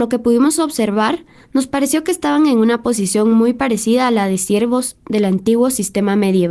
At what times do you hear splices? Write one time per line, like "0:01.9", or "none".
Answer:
none